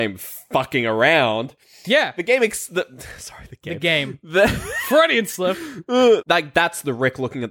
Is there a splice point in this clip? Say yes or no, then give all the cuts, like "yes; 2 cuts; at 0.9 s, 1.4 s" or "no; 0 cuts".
yes; 1 cut; at 6.2 s